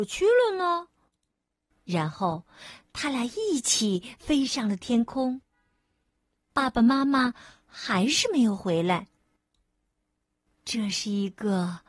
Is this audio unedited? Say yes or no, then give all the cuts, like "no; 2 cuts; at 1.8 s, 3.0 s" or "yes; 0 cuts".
no; 3 cuts; at 1.7 s, 6.5 s, 10.6 s